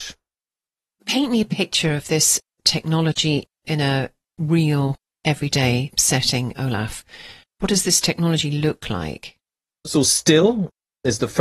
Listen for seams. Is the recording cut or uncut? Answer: uncut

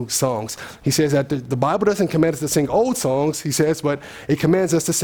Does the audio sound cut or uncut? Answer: uncut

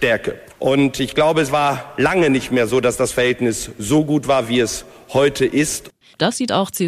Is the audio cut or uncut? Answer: uncut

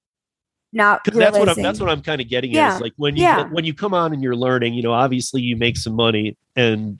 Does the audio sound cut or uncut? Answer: uncut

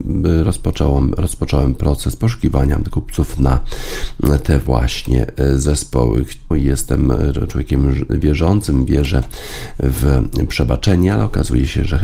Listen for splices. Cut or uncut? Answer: cut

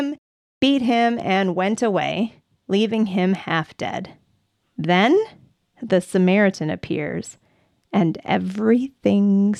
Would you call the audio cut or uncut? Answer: cut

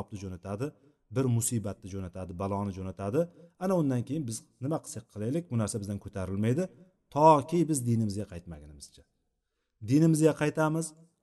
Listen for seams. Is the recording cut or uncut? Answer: uncut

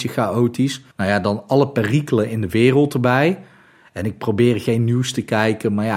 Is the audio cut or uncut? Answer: cut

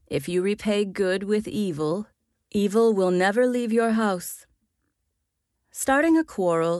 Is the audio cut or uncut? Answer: uncut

